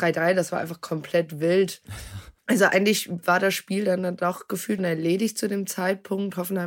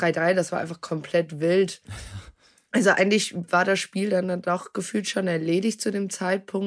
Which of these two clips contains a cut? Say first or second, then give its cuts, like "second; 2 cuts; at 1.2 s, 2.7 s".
first; 2 cuts; at 2.4 s, 4.8 s